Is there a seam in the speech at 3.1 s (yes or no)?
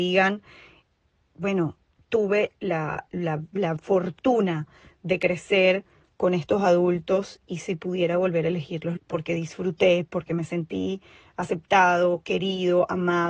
no